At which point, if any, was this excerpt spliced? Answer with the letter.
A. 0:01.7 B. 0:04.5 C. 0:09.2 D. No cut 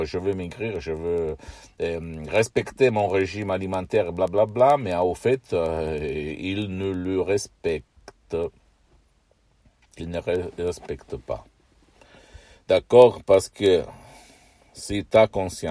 D